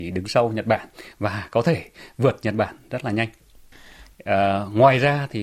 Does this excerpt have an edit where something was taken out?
yes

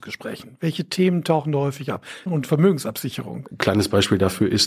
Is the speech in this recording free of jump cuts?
no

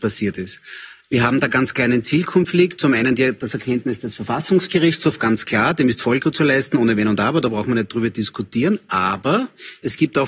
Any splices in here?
no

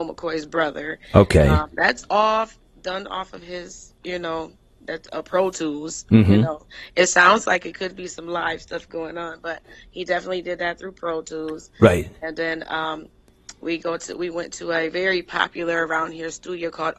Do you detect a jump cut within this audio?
no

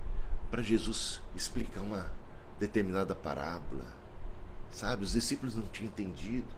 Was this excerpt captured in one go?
yes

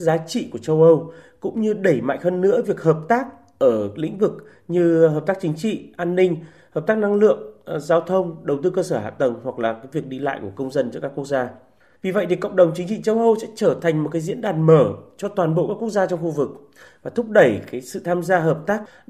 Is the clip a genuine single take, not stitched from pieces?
no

